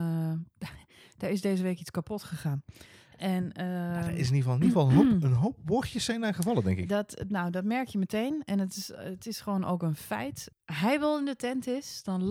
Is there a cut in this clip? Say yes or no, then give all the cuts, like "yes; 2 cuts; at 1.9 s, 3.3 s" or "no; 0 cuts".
yes; 1 cut; at 10.5 s